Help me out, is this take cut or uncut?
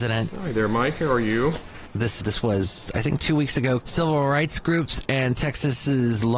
cut